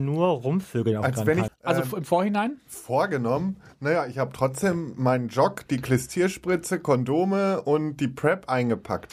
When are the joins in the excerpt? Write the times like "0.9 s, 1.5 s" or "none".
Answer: 1.5 s